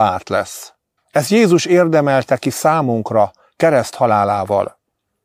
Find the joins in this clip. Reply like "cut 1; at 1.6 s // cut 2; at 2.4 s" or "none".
cut 1; at 1.0 s